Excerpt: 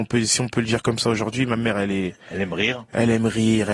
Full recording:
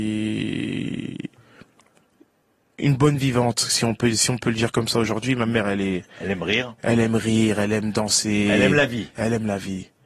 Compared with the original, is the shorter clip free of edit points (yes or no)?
yes